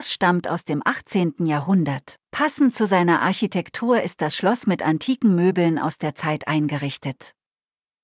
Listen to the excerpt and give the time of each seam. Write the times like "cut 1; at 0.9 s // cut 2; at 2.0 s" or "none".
cut 1; at 2.2 s